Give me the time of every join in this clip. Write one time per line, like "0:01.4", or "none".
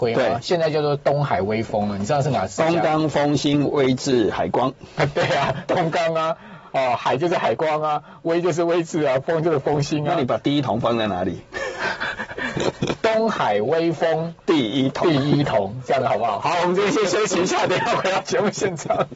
0:05.7